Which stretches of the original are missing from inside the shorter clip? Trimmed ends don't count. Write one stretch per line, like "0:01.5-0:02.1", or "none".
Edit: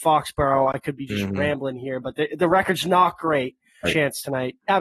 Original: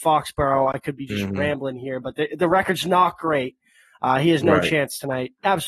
0:03.8-0:04.6